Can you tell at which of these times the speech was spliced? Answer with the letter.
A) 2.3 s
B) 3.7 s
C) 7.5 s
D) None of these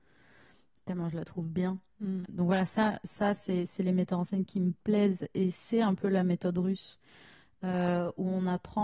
A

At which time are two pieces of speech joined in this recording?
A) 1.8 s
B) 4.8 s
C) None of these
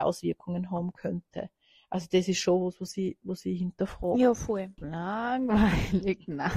B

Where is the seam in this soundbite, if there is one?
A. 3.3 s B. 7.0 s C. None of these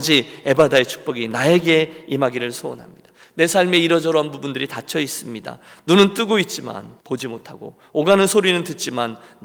B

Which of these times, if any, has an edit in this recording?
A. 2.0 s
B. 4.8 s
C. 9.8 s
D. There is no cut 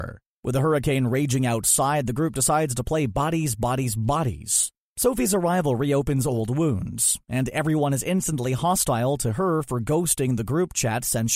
B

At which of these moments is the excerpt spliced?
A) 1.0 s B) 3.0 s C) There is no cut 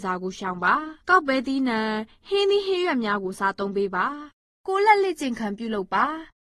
A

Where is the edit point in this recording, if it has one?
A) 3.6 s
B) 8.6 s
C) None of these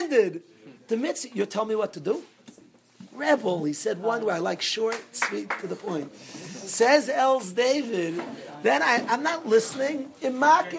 B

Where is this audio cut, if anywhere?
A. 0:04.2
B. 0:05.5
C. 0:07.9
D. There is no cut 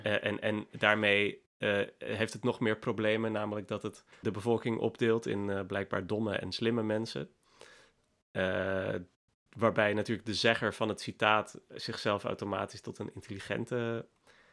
A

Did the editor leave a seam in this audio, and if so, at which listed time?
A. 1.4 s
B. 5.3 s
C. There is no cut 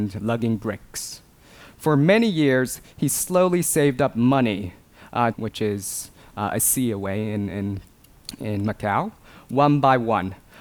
B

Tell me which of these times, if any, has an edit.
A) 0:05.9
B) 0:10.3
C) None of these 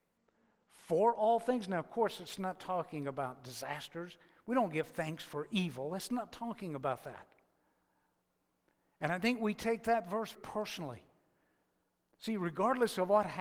B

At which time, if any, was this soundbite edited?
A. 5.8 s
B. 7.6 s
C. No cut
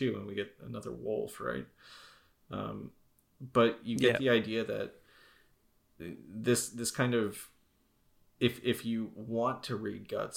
C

